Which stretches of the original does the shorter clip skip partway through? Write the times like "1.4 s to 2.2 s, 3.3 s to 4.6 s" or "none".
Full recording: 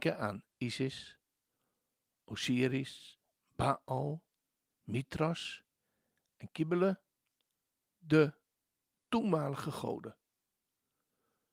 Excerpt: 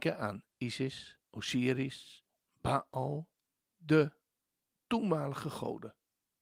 1.2 s to 2.2 s, 4.6 s to 7.8 s